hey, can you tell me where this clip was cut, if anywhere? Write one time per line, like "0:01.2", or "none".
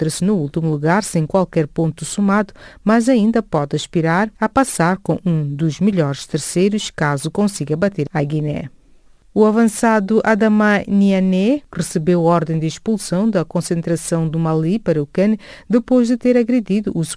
0:11.7